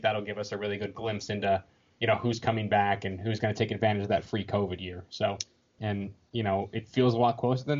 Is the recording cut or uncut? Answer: cut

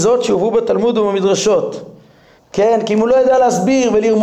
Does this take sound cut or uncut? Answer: cut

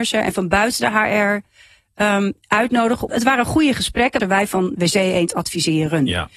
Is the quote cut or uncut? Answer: cut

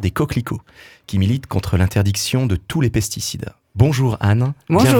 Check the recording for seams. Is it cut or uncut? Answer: uncut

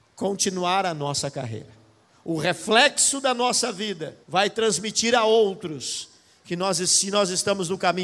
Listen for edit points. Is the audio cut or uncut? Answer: cut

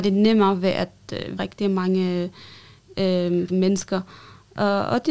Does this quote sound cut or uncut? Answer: cut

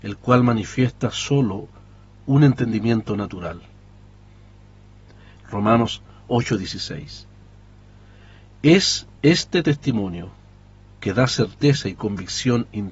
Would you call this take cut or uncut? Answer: cut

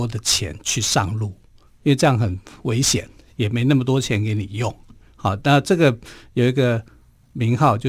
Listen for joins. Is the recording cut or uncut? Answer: uncut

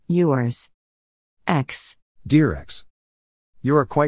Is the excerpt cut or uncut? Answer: uncut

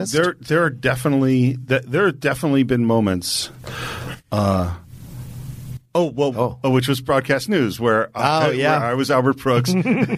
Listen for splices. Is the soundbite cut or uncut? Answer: cut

